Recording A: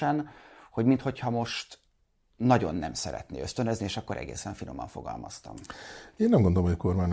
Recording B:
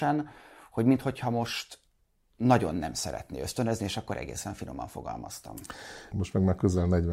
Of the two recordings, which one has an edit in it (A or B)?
B